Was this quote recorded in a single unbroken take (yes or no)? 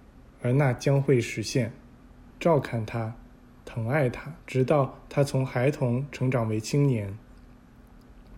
no